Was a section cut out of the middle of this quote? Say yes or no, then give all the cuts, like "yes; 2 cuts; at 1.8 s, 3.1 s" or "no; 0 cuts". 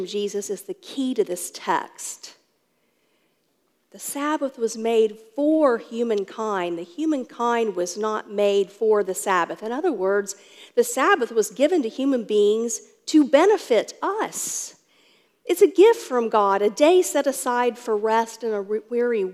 no; 0 cuts